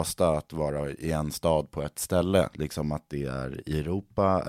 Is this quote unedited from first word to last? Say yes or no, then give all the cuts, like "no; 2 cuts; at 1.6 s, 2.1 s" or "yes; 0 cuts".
no; 1 cut; at 2.5 s